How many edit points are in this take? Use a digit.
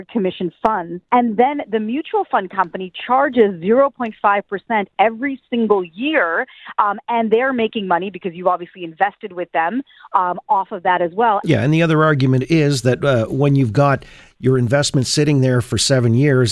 2